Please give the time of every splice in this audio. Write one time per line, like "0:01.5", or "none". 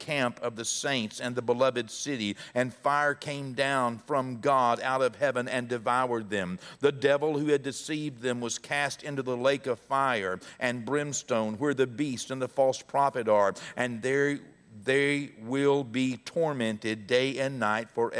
none